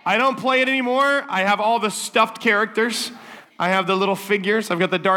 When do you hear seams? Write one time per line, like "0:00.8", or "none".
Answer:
none